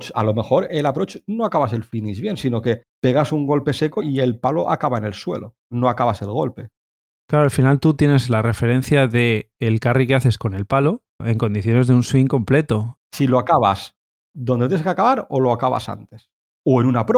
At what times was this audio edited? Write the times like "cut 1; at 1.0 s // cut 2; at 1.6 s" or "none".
cut 1; at 11.2 s // cut 2; at 13.0 s